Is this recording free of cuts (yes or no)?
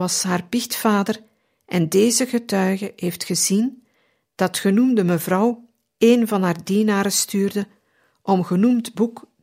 yes